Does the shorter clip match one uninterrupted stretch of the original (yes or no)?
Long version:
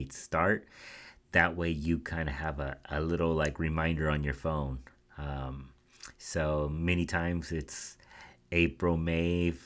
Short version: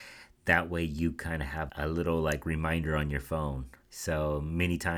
no